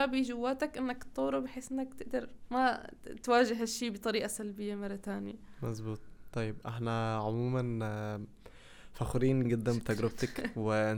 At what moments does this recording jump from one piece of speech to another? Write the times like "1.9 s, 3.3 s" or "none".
9.4 s